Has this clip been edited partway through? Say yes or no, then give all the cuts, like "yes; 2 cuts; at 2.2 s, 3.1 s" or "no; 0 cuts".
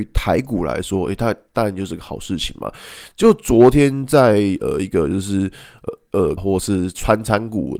yes; 2 cuts; at 3.1 s, 6.4 s